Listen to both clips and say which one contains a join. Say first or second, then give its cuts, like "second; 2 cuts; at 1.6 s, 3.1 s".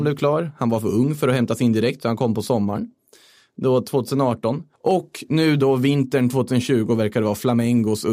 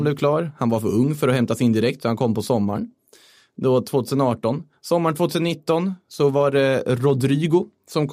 first; 1 cut; at 4.7 s